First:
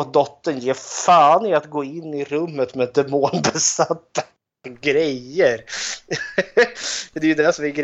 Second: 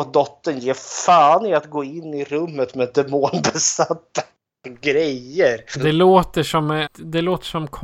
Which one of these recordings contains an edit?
second; 2 cuts; at 5.7 s, 6.9 s

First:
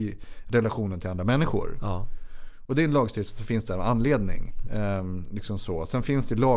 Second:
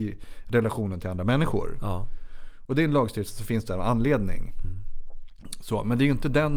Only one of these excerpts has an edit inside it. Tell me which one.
first; 1 cut; at 4.6 s

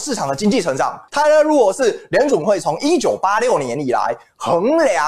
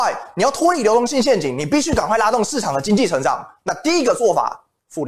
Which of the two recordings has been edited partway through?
first; 1 cut; at 1.1 s

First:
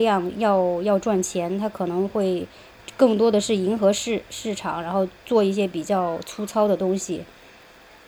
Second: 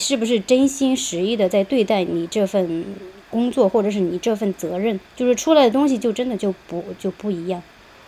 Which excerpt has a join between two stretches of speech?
second; 2 cuts; at 5.1 s, 7.0 s

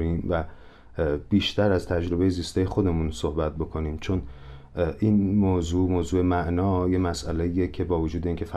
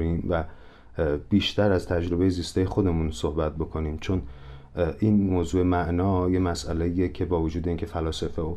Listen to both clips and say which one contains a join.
second; 1 cut; at 5.3 s

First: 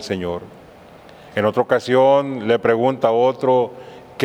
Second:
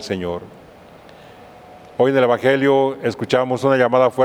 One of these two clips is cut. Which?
first; 1 cut; at 1.3 s

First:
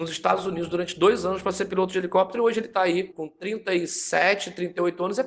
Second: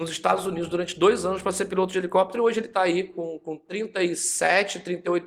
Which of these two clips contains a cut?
first; 1 cut; at 3.1 s

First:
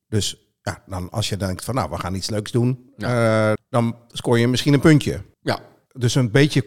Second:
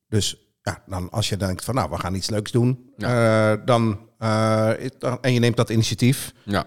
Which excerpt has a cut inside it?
first; 2 cuts; at 3.6 s, 5.3 s

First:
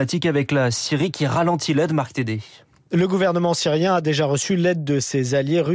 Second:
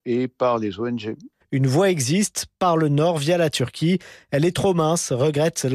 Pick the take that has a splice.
second; 1 cut; at 1.4 s

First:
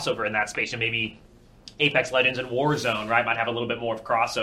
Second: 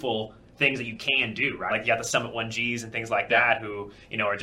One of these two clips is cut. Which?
second; 1 cut; at 1.7 s

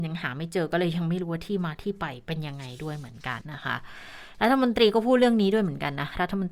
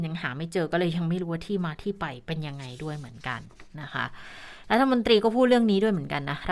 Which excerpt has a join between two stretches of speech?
first; 1 cut; at 3.4 s

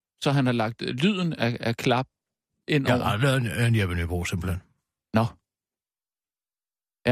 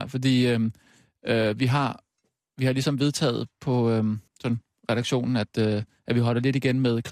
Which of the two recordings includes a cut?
second; 1 cut; at 4.3 s

